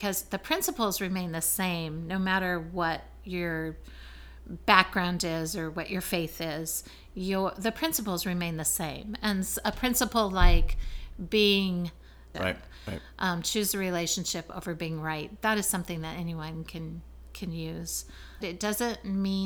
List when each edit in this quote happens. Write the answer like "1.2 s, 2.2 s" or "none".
12.3 s, 18.4 s